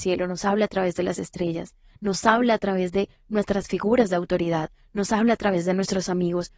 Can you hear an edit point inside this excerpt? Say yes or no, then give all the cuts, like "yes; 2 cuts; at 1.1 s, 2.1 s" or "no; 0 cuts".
no; 0 cuts